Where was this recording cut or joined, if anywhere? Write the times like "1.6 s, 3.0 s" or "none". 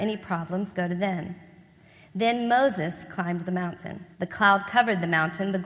4.1 s